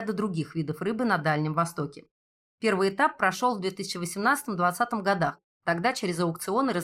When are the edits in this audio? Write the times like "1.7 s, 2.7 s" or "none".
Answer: none

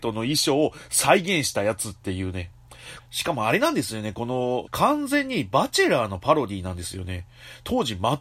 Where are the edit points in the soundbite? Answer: 3.0 s, 4.7 s

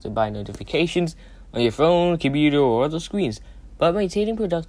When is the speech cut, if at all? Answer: none

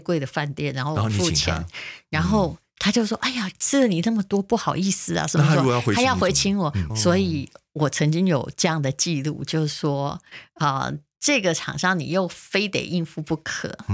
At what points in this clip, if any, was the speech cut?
6.9 s

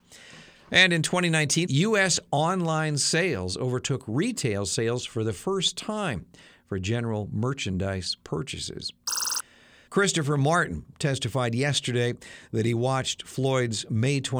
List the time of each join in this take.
1.7 s, 9.9 s

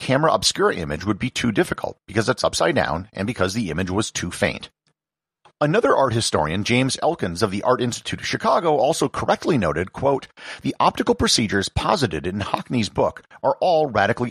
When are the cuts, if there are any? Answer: none

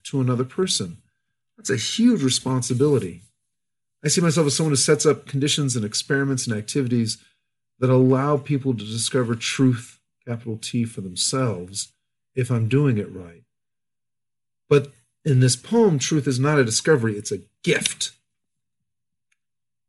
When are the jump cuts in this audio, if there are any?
none

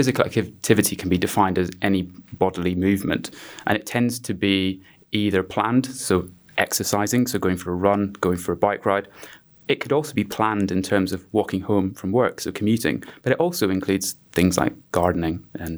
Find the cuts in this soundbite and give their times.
none

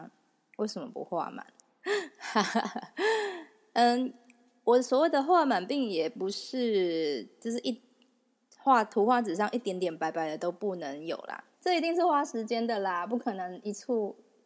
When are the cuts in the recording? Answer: 11.6 s

